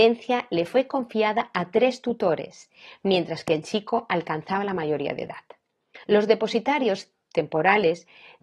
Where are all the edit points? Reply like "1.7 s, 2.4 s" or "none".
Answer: 6.0 s